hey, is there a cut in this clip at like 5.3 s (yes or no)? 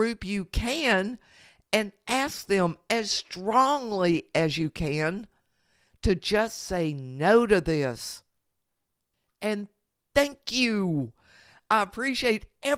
no